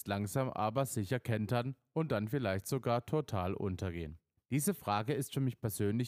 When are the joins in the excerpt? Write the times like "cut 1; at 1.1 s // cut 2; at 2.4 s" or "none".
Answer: cut 1; at 4.3 s